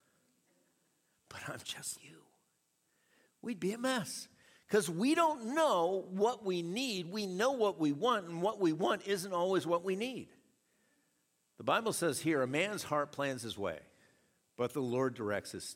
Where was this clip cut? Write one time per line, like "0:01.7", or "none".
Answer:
0:02.0
0:11.4